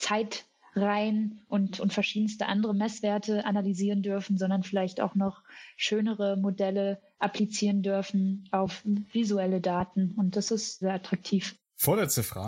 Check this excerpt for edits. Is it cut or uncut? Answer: cut